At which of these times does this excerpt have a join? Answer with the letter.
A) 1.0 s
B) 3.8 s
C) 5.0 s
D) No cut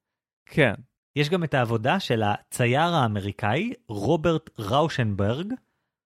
A